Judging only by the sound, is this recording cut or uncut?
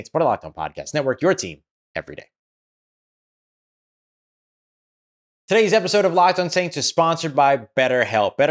uncut